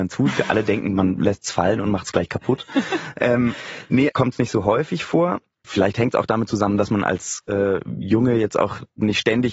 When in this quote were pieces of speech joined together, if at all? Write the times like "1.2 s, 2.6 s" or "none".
4.1 s, 5.6 s

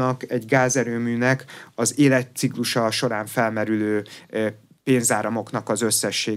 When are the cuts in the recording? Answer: none

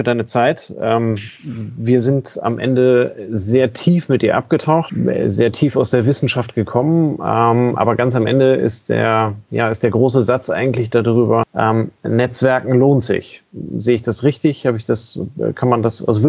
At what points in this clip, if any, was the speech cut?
none

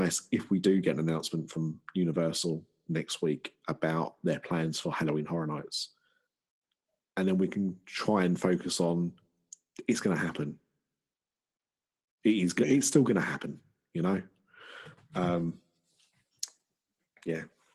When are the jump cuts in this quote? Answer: none

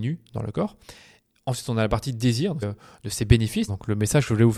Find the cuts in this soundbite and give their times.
2.6 s, 3.7 s

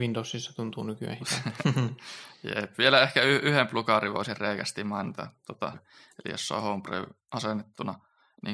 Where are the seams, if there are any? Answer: 5.7 s

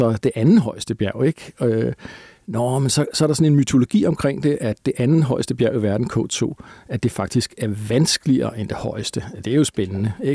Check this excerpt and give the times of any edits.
none

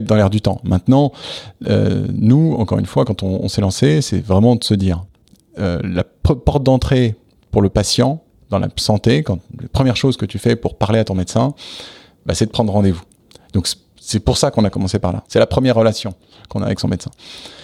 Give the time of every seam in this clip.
15.2 s

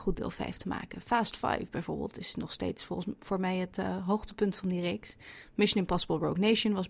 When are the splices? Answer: none

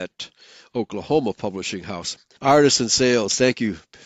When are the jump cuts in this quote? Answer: 2.4 s

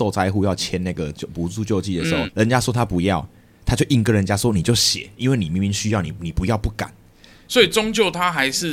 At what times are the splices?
2.3 s

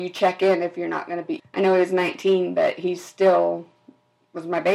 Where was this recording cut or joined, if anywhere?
1.4 s

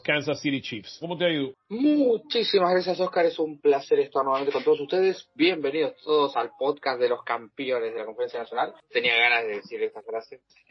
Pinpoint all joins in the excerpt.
1.0 s

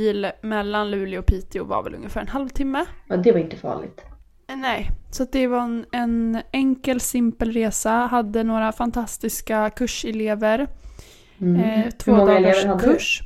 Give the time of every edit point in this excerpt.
none

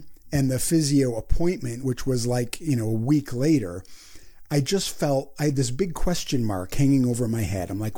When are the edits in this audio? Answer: none

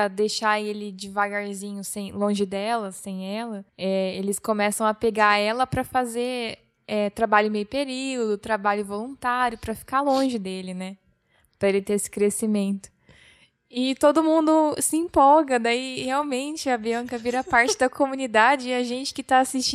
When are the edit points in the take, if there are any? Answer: 3.7 s

